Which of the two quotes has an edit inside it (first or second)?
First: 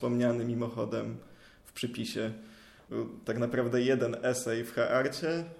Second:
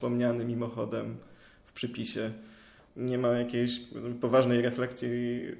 first